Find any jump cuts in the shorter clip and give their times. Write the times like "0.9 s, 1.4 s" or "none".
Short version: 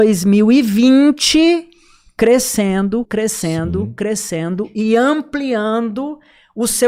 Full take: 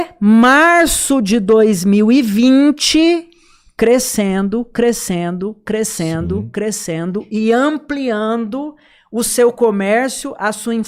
3.0 s